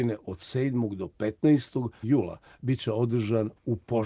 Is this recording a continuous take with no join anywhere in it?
no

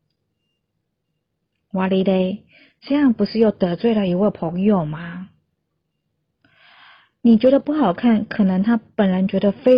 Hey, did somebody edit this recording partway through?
no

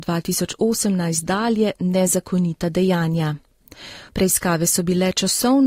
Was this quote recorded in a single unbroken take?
no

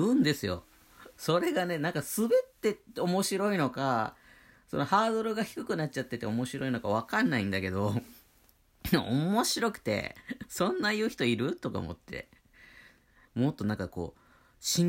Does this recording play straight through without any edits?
no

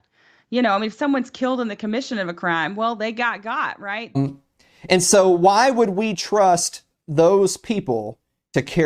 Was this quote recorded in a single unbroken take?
no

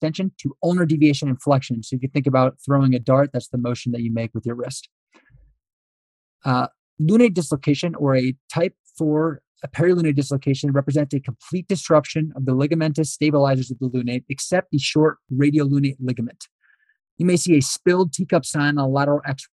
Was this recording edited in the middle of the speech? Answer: no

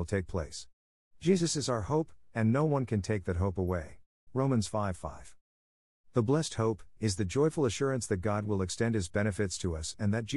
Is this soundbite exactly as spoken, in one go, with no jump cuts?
no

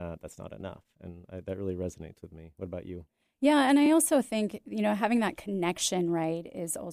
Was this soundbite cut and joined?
no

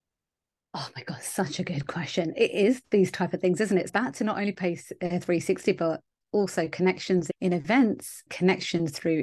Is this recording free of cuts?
yes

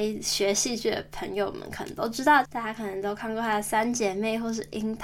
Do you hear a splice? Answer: yes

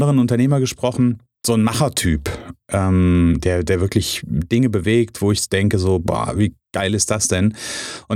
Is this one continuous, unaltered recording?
yes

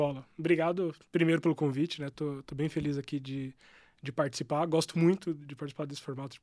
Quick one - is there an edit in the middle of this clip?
no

